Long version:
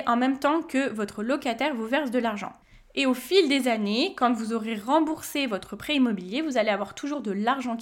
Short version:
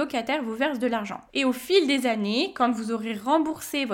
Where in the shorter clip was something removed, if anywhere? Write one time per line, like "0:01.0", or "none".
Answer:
0:01.3